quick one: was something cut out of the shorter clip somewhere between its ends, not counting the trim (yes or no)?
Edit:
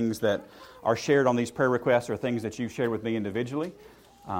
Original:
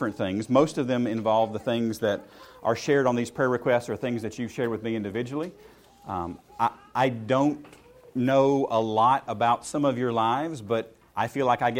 no